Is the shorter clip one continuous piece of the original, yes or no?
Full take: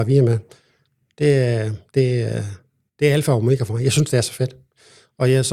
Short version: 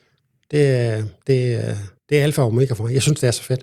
no